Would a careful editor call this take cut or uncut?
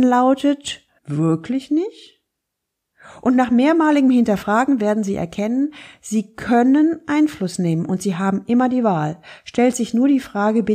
cut